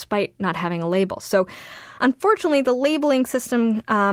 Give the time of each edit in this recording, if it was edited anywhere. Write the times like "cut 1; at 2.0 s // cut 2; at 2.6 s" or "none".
none